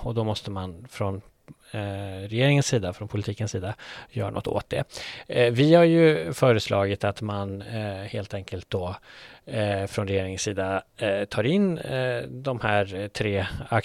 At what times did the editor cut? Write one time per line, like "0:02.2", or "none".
none